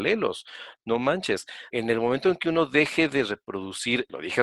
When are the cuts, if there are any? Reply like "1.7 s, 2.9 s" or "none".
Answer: 1.7 s